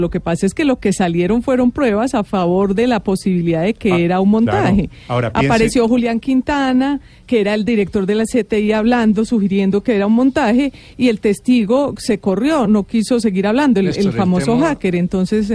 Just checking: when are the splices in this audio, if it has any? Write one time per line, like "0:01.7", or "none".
0:07.2
0:12.6

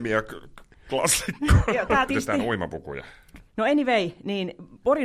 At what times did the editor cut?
0:02.1
0:03.5

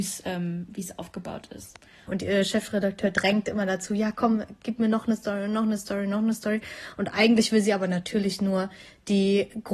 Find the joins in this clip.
0:02.1

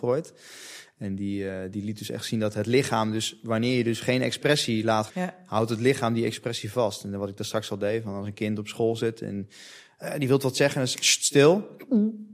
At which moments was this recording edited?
0:05.1

